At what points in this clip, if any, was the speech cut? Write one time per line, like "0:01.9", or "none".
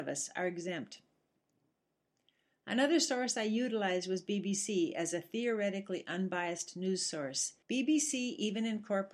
0:07.6